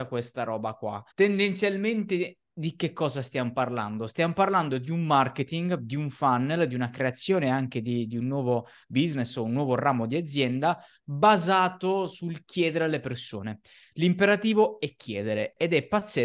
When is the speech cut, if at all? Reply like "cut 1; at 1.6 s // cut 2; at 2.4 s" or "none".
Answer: cut 1; at 1.1 s